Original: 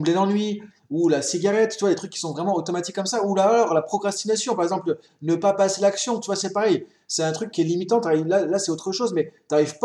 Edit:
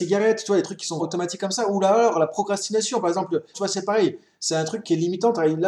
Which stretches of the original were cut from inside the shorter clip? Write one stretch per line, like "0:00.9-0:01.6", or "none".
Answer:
0:02.3-0:02.5
0:05.1-0:06.2